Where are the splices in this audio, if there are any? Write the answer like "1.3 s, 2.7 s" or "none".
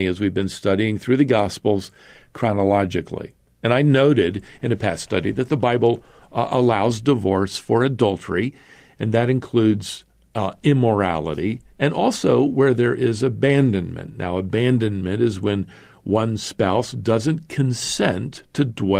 none